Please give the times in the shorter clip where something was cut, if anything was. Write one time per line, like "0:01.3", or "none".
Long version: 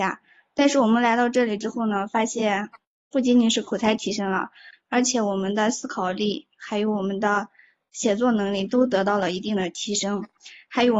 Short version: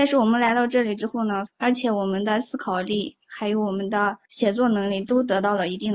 0:01.5
0:04.3